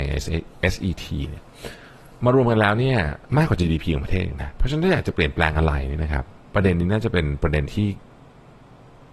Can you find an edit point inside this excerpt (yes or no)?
yes